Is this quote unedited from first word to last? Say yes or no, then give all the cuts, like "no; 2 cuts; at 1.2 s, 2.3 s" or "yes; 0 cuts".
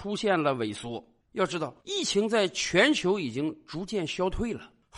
no; 1 cut; at 1.8 s